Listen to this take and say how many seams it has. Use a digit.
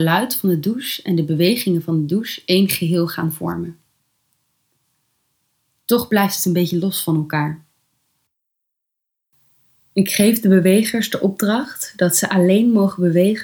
0